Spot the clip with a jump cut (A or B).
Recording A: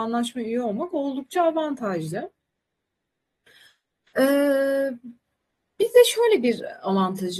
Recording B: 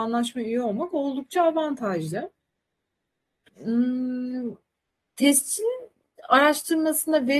B